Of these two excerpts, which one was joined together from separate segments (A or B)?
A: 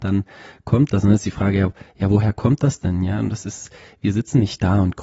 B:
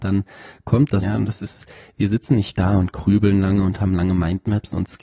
B